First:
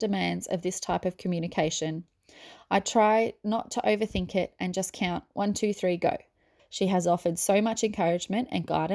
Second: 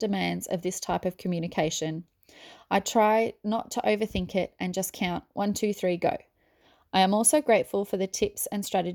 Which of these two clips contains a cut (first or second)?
first